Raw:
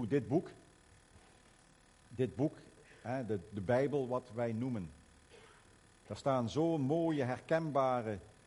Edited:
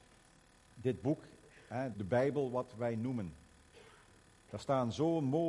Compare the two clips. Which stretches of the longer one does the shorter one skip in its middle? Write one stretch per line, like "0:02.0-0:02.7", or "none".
0:03.3-0:03.5